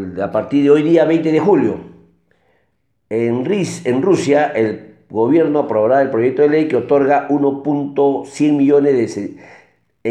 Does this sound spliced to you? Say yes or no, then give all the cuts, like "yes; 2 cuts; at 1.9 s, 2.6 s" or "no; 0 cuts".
no; 0 cuts